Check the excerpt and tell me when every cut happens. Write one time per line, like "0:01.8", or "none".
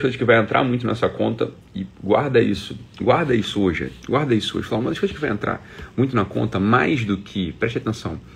0:01.6